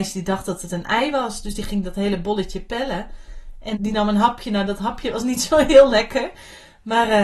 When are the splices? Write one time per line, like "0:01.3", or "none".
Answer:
0:03.7